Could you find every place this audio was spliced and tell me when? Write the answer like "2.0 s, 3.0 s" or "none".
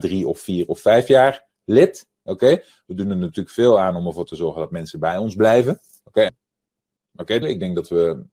6.3 s, 7.4 s

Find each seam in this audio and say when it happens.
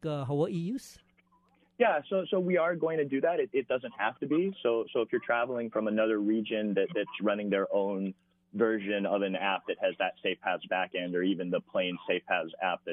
none

